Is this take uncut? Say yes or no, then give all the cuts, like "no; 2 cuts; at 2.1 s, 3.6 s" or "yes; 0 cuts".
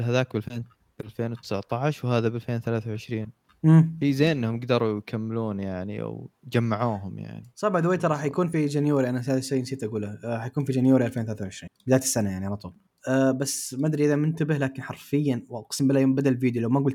yes; 0 cuts